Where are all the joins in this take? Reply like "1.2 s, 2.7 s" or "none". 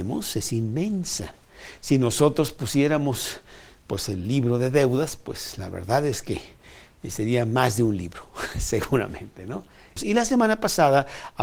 10.0 s